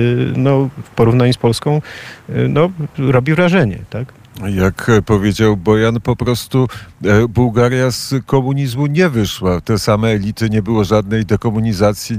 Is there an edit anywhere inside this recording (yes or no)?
no